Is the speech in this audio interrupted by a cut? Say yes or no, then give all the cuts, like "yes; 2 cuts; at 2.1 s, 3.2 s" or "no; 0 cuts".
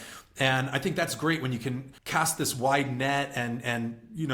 yes; 1 cut; at 2.0 s